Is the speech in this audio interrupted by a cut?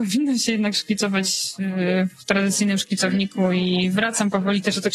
no; 0 cuts

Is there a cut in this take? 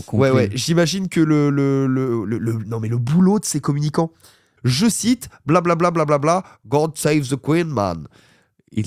yes; 1 cut; at 4.6 s

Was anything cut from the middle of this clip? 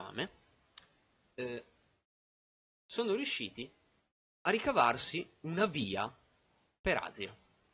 yes; 1 cut; at 4.3 s

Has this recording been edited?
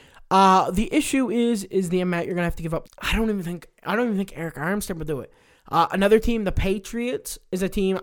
yes; 1 cut; at 2.8 s

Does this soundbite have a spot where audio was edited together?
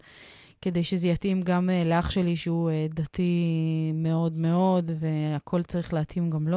no; 0 cuts

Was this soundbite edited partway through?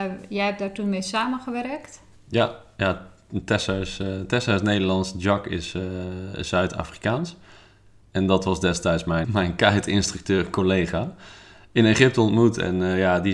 yes; 1 cut; at 9.2 s

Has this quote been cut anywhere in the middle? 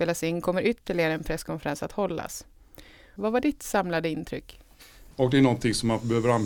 yes; 2 cuts; at 3.2 s, 5.1 s

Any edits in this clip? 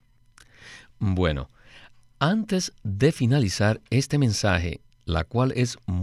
yes; 1 cut; at 4.9 s

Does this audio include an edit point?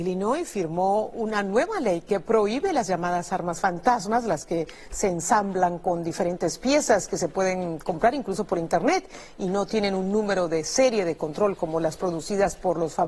no; 0 cuts

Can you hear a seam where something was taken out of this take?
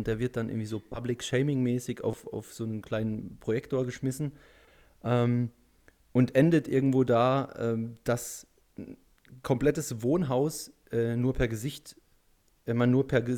no; 0 cuts

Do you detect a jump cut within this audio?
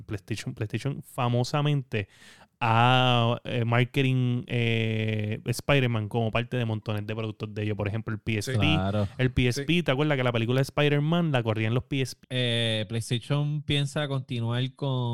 yes; 1 cut; at 12.2 s

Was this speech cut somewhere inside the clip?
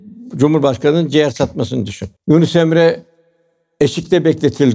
yes; 1 cut; at 2.2 s

